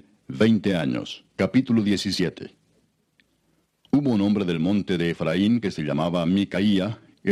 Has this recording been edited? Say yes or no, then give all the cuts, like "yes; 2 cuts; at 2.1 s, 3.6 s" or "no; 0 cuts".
no; 0 cuts